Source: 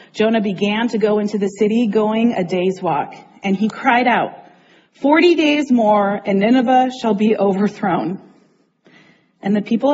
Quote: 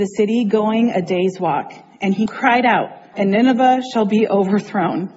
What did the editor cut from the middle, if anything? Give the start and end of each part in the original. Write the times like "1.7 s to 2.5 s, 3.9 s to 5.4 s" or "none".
4.6 s to 6.2 s